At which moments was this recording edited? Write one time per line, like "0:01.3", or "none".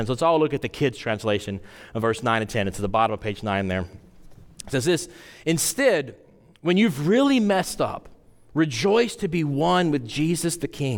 none